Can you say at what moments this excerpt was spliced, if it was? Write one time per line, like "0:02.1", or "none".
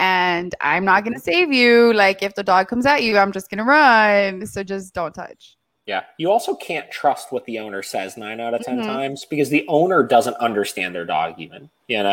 none